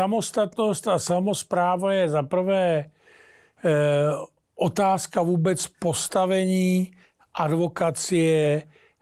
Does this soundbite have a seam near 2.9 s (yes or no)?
no